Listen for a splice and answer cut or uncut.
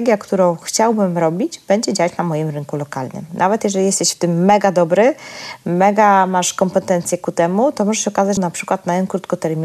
cut